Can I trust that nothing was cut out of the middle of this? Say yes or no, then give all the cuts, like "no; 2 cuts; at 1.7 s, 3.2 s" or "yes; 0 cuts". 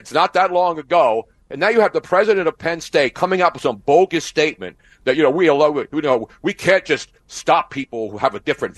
yes; 0 cuts